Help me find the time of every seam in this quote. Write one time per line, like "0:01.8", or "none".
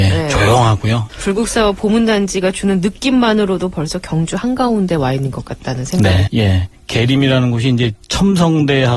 0:01.1
0:06.3